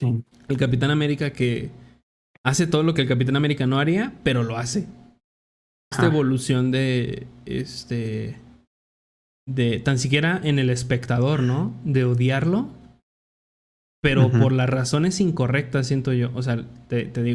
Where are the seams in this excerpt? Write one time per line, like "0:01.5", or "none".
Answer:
0:05.9